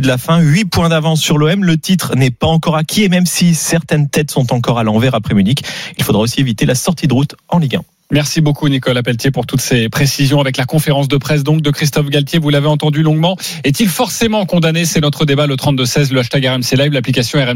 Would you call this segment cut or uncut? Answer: uncut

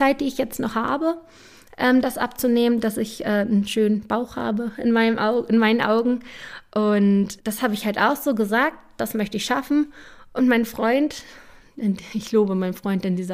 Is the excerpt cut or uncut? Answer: cut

